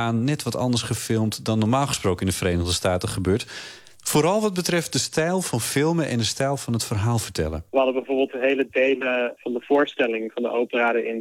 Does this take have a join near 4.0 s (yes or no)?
no